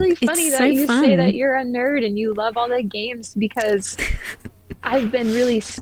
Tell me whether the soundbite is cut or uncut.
uncut